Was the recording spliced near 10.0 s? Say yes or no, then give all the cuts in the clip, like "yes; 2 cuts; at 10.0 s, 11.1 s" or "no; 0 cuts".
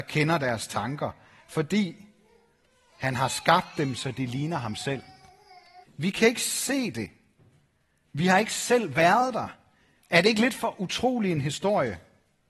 yes; 2 cuts; at 5.8 s, 10.0 s